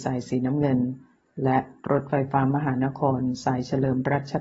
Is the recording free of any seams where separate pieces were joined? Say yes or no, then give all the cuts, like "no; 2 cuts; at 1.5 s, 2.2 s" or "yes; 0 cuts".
yes; 0 cuts